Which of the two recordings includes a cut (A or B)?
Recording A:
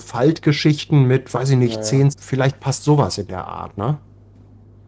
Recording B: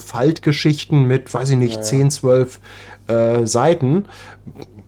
A